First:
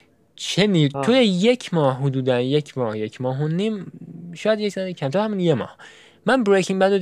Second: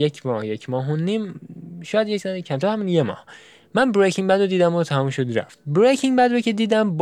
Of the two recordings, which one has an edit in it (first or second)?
first